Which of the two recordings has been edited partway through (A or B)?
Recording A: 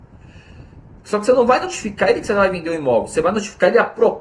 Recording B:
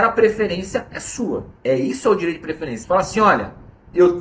B